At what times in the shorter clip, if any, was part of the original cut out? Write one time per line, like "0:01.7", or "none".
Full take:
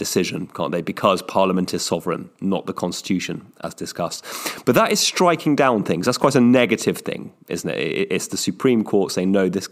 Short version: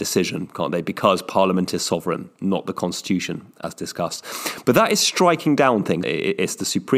0:06.0